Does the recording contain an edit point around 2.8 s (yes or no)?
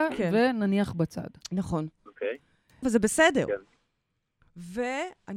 yes